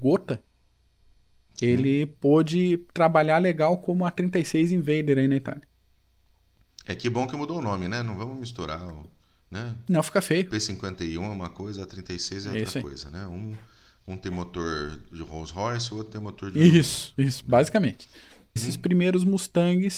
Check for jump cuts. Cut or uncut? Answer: cut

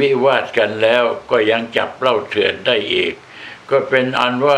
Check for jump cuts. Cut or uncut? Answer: uncut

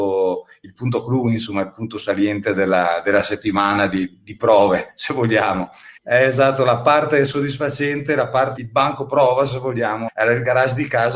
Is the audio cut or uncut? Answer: cut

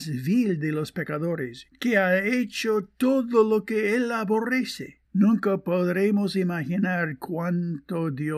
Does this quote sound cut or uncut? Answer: cut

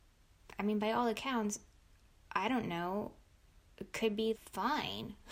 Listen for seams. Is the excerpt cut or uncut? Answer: cut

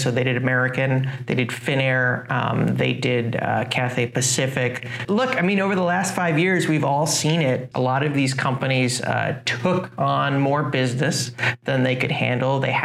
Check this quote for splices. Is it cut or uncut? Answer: cut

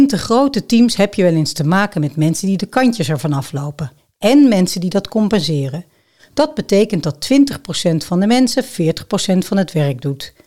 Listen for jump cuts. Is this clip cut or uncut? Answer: uncut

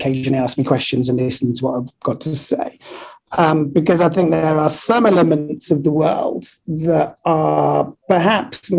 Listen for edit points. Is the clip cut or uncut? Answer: uncut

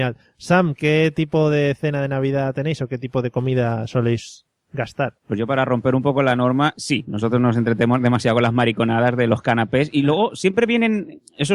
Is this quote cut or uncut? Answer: cut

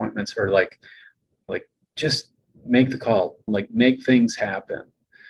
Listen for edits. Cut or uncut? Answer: cut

